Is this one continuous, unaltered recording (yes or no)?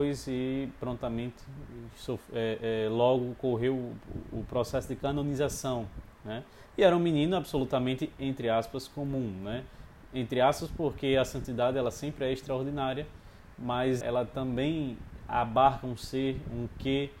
no